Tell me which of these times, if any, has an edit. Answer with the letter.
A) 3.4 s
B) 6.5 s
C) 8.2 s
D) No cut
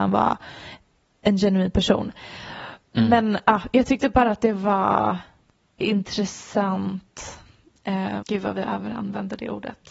C